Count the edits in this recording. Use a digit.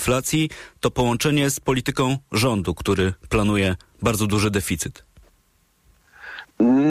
0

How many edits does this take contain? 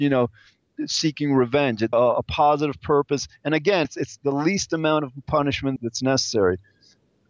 3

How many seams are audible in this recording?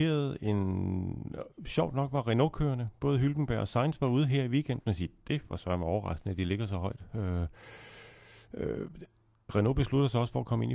1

